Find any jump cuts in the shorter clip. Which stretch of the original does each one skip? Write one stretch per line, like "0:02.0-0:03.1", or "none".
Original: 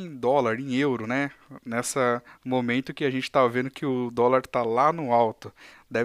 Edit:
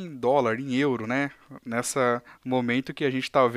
none

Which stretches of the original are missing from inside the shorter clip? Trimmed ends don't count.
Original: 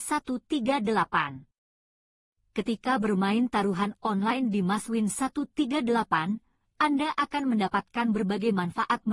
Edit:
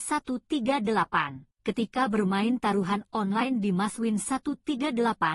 0:01.6-0:02.5

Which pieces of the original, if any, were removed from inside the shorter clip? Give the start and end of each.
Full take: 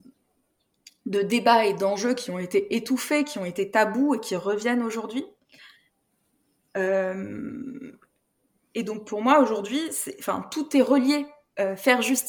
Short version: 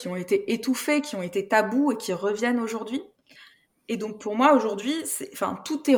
0:05.9-0:08.6

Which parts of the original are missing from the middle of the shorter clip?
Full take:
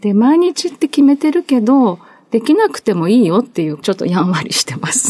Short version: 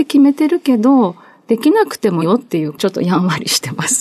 0:03.0-0:03.3

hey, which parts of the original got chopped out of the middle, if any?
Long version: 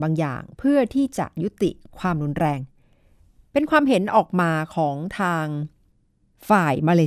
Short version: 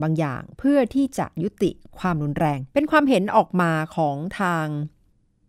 0:02.7-0:03.5

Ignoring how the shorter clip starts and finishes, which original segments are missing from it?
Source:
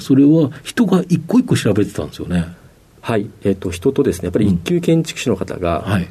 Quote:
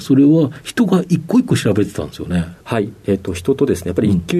0:02.6-0:03.0

